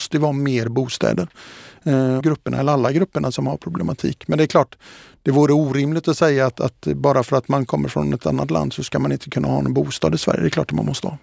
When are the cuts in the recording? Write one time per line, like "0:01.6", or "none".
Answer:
0:02.2